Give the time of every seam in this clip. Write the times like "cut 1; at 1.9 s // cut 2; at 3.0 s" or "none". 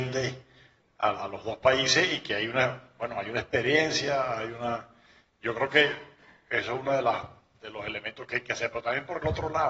cut 1; at 1.1 s